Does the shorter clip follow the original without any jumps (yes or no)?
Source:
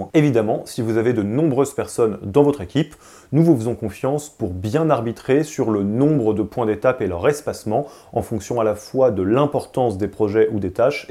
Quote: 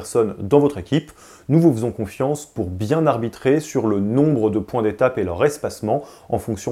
yes